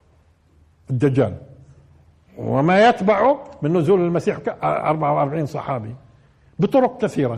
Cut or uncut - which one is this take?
uncut